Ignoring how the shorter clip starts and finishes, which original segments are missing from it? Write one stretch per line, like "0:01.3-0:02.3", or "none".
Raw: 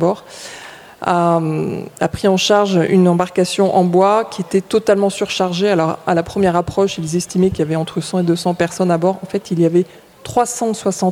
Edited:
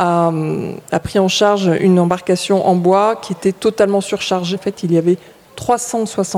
0:05.6-0:09.2